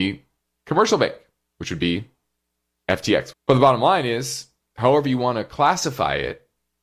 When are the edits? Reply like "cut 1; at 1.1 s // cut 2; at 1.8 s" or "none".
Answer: cut 1; at 3.3 s